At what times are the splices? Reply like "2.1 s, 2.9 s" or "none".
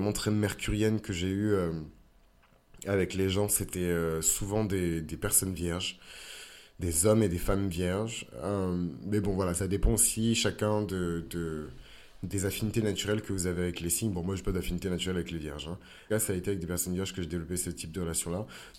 5.0 s, 16.1 s